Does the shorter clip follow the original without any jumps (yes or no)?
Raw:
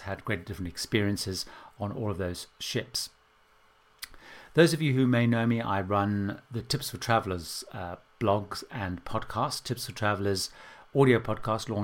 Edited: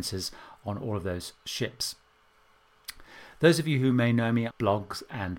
no